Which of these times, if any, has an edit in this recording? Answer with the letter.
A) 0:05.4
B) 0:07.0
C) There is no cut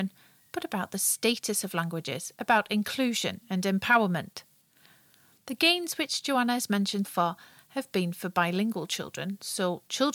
B